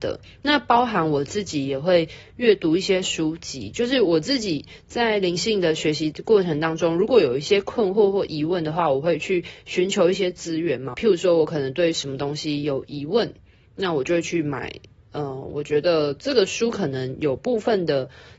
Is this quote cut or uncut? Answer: cut